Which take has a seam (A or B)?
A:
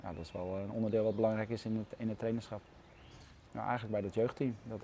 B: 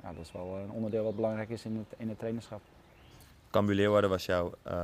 A